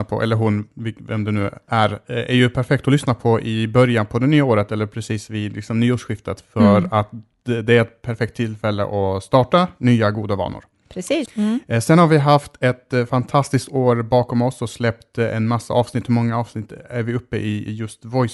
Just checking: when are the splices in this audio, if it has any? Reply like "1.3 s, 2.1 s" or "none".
11.3 s